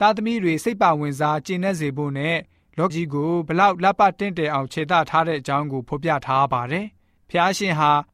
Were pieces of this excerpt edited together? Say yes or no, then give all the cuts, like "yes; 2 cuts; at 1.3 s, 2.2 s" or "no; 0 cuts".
yes; 1 cut; at 2.9 s